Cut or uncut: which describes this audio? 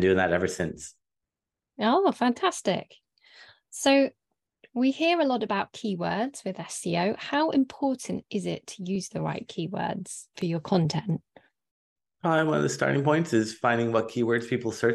uncut